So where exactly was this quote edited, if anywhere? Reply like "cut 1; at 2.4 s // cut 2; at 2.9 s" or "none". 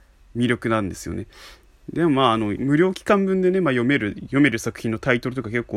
cut 1; at 2.6 s